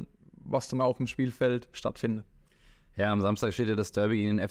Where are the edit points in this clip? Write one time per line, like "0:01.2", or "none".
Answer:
none